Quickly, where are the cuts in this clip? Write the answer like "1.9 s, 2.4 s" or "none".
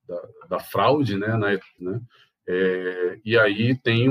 1.8 s